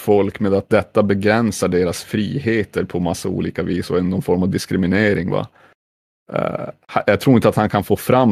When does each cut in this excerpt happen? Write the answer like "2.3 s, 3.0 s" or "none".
none